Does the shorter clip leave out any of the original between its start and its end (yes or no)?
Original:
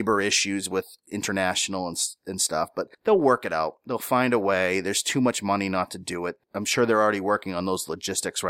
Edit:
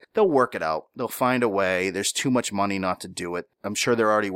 no